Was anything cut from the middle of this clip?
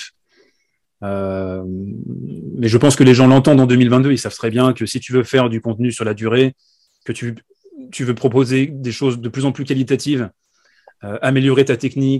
no; 0 cuts

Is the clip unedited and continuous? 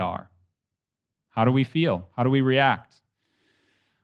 yes; 0 cuts

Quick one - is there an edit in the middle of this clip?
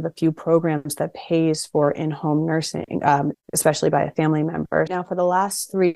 yes; 2 cuts; at 3.3 s, 4.9 s

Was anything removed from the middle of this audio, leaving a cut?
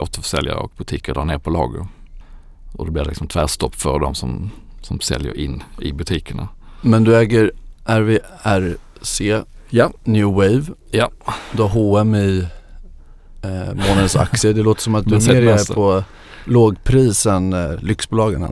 no; 0 cuts

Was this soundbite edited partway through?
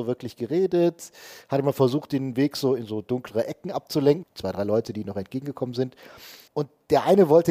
yes; 1 cut; at 4.2 s

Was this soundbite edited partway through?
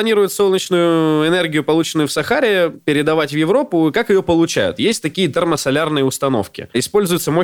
no; 0 cuts

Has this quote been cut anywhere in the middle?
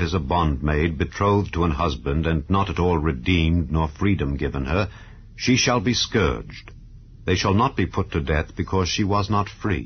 no; 0 cuts

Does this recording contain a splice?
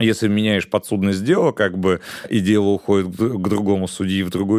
no; 0 cuts

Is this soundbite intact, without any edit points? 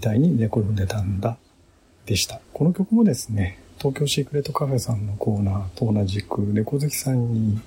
no; 1 cut; at 2.4 s

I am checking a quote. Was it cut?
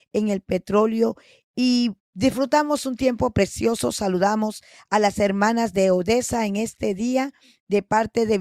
no; 0 cuts

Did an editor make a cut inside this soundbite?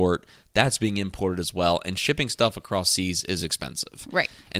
no; 0 cuts

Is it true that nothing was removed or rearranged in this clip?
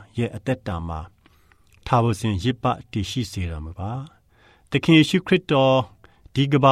yes; 0 cuts

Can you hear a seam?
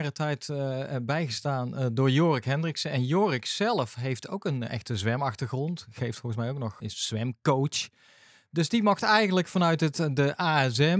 yes; 1 cut; at 6.8 s

